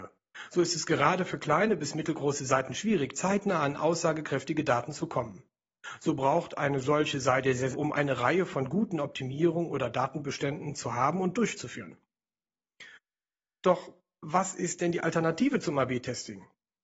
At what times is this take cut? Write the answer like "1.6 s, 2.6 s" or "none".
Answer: 7.7 s